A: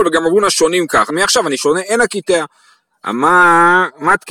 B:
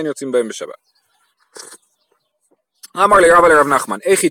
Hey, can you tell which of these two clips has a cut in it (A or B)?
A